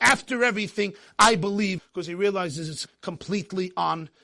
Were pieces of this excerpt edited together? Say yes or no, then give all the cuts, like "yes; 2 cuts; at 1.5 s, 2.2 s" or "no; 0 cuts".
yes; 2 cuts; at 1.8 s, 2.9 s